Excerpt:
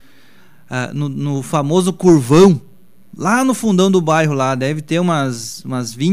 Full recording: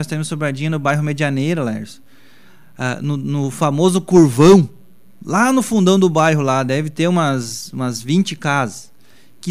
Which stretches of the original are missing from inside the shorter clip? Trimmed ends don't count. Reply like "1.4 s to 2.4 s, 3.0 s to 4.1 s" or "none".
none

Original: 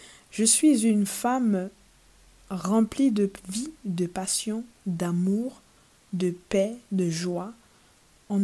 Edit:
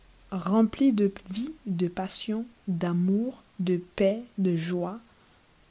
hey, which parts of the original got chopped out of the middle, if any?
5.7 s to 6.0 s

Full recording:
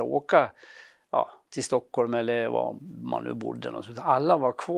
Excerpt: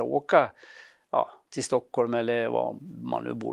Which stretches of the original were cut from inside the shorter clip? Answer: none

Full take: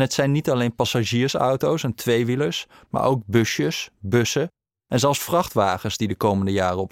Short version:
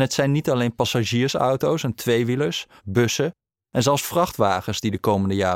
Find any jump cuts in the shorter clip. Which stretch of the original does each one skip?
2.8 s to 3.9 s

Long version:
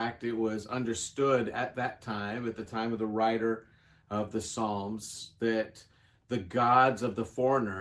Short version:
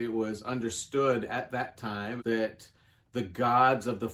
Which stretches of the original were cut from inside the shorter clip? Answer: 2.4 s to 5.3 s

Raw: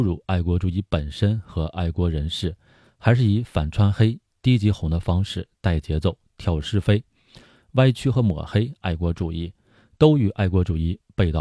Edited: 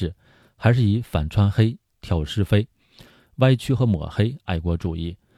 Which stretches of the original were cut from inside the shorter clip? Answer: 4.3 s to 6.3 s

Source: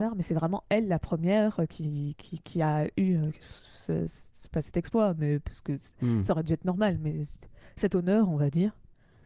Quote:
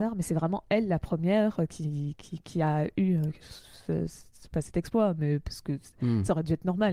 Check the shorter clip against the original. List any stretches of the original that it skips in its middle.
none

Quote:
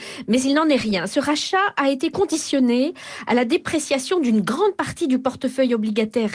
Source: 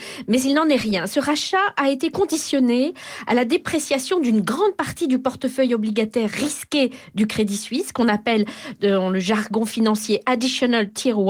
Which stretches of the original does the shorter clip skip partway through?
none

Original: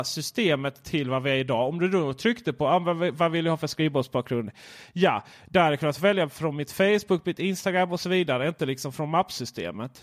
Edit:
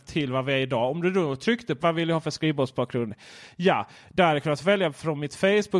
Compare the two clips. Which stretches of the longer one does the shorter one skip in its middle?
2.6 s to 3.2 s

